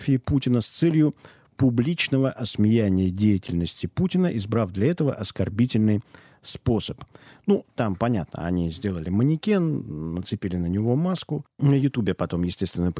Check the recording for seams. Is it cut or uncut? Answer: uncut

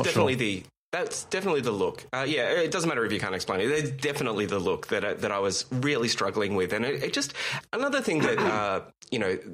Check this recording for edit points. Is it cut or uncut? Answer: uncut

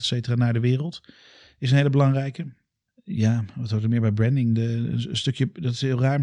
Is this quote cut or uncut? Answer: uncut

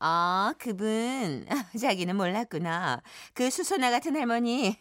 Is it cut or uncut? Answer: uncut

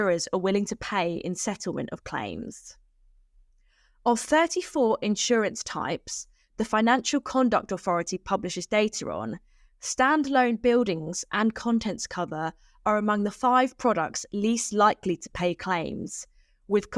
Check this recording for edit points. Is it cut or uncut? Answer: uncut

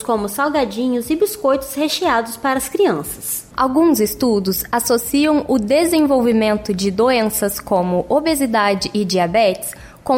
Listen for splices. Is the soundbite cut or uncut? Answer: cut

